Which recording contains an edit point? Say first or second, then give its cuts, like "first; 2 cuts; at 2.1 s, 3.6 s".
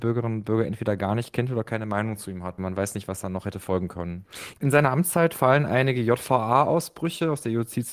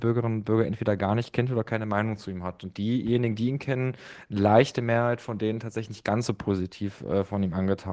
first; 2 cuts; at 2.6 s, 4.6 s